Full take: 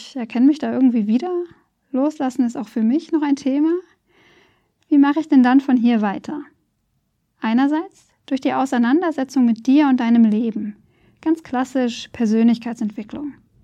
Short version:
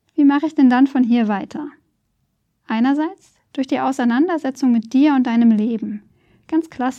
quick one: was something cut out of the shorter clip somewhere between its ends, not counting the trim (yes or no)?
no